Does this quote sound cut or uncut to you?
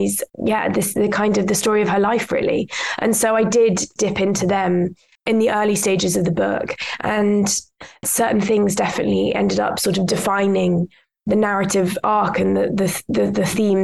uncut